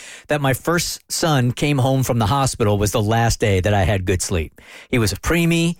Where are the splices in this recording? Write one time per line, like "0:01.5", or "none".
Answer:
none